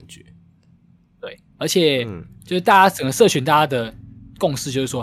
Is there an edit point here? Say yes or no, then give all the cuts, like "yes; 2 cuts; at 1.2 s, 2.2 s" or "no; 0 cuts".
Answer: yes; 1 cut; at 1.5 s